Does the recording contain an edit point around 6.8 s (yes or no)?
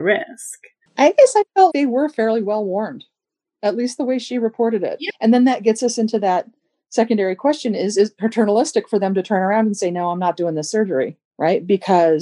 no